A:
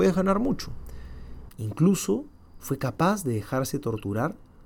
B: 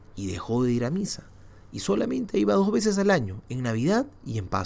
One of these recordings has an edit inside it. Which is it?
A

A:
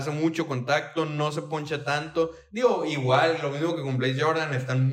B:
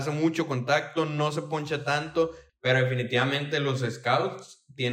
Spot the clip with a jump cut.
B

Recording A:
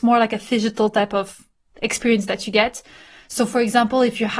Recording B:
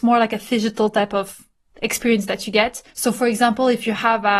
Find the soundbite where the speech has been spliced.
B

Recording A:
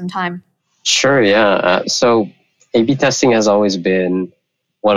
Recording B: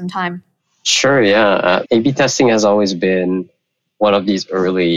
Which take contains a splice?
B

